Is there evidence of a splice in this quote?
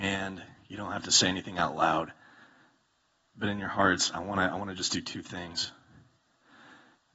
no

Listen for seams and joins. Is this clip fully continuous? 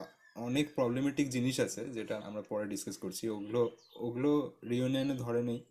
no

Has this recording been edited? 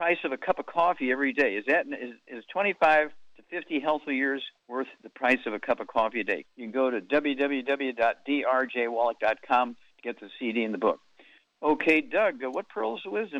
yes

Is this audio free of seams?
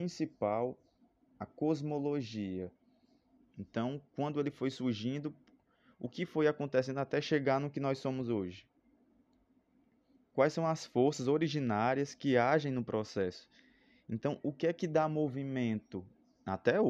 no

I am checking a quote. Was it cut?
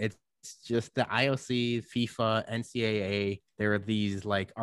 no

